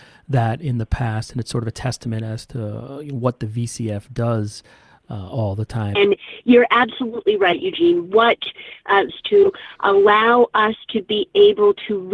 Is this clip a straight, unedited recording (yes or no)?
no